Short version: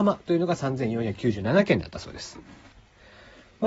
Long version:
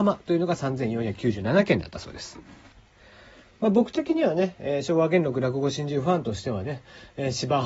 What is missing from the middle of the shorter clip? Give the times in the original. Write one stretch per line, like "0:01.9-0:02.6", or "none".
none